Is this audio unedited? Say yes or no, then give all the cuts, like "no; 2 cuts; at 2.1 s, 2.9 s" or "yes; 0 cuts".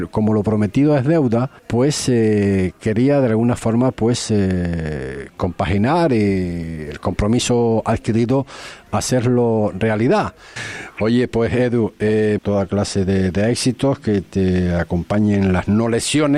no; 3 cuts; at 1.6 s, 10.6 s, 12.4 s